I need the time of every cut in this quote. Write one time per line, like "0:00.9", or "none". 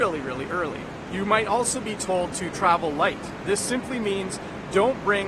none

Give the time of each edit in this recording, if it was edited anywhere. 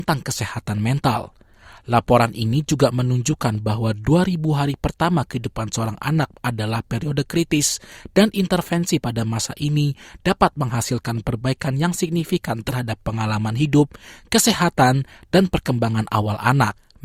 none

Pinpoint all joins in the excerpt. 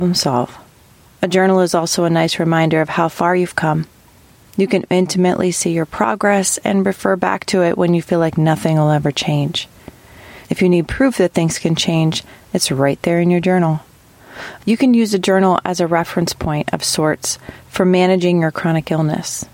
none

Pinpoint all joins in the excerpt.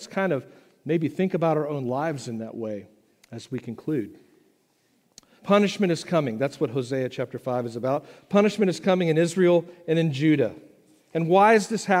0:05.4

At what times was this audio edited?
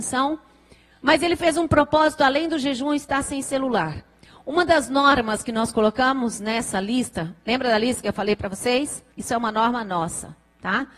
0:09.1

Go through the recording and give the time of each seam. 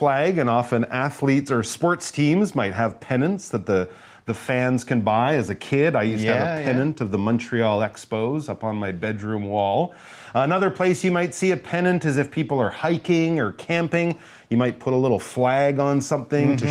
none

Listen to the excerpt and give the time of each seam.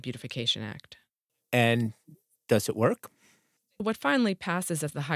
none

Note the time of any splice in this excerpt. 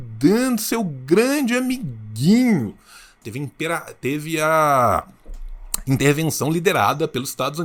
0:03.2

